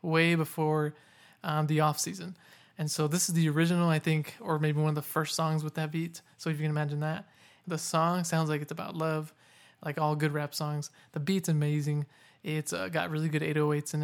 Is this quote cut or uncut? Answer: uncut